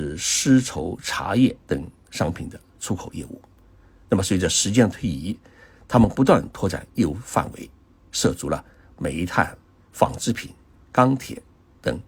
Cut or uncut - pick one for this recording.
uncut